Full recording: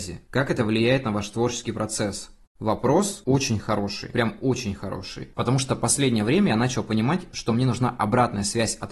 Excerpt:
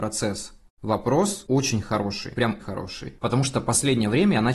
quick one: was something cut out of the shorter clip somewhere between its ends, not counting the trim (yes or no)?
yes